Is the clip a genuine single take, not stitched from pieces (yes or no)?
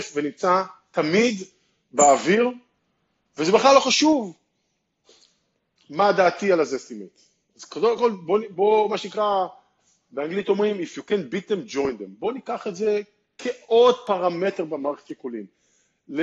no